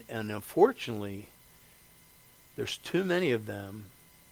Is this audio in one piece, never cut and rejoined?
yes; 0 cuts

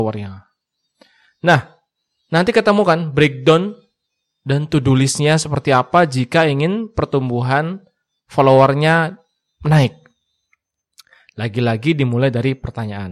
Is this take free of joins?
yes; 0 cuts

